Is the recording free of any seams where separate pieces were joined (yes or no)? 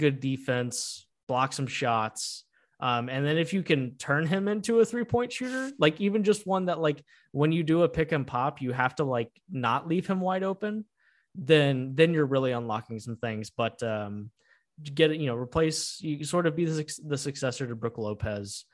yes